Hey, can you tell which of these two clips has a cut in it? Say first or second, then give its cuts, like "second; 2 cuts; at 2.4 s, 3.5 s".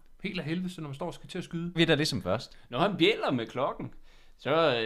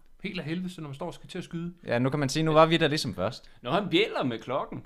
first; 1 cut; at 1.8 s